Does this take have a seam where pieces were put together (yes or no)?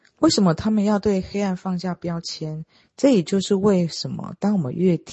yes